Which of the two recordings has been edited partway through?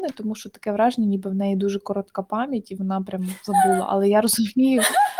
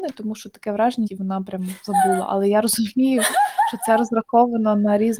second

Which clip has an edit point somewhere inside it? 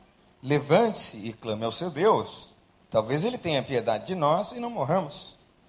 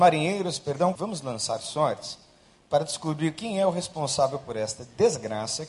second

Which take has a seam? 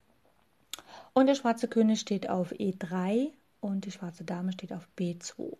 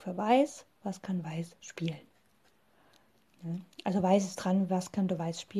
first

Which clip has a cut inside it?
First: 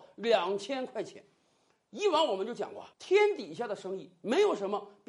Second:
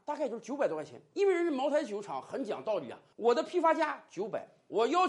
first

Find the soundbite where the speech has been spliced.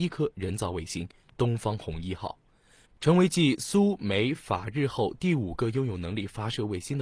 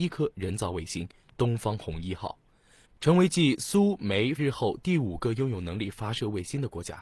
second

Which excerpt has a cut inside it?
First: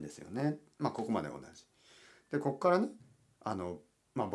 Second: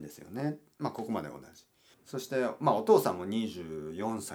second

